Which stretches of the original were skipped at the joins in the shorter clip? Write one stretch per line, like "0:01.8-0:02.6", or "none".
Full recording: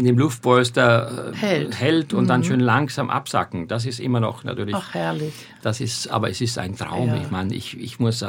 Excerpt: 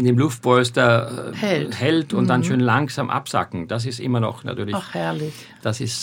none